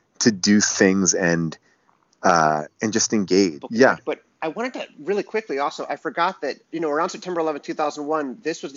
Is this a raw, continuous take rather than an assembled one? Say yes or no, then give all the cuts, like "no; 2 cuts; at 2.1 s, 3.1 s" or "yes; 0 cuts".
no; 2 cuts; at 3.6 s, 6.6 s